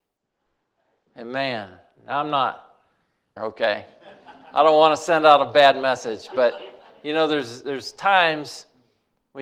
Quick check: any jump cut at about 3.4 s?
yes; 1 cut; at 3.4 s

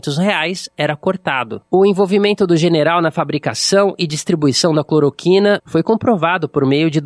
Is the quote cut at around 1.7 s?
yes; 2 cuts; at 1.7 s, 5.6 s

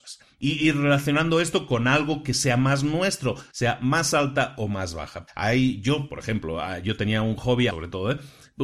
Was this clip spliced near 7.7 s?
yes; 3 cuts; at 3.5 s, 5.3 s, 7.7 s

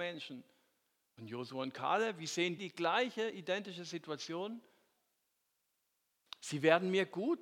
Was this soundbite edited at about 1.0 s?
no; 2 cuts; at 2.6 s, 6.3 s

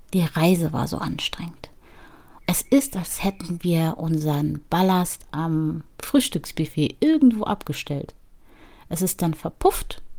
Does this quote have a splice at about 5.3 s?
yes; 2 cuts; at 2.4 s, 5.3 s

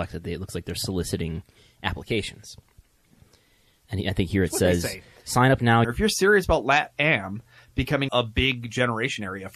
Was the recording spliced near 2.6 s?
no; 2 cuts; at 5.8 s, 8.1 s

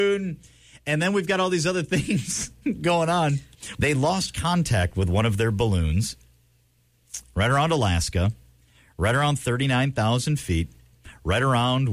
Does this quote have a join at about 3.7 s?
yes; 1 cut; at 3.7 s

